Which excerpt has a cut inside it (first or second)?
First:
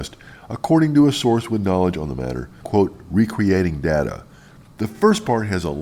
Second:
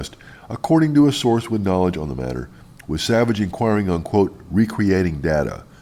first